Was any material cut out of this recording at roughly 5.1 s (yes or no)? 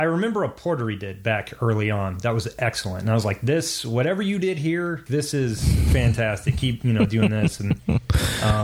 yes